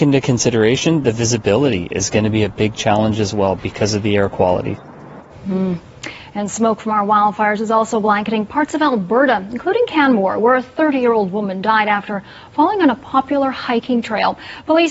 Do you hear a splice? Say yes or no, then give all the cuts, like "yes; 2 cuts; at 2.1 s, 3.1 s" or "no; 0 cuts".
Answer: no; 0 cuts